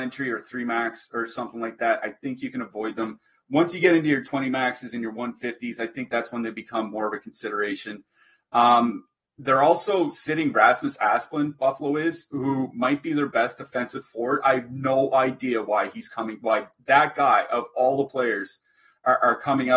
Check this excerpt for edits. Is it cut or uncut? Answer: uncut